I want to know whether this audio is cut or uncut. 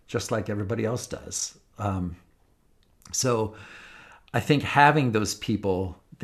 uncut